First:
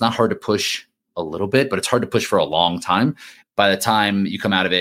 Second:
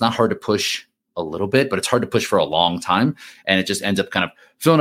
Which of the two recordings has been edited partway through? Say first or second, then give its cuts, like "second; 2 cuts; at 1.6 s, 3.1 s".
first; 1 cut; at 3.4 s